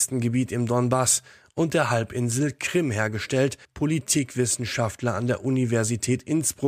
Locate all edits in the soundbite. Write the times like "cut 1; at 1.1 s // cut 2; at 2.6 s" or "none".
cut 1; at 3.6 s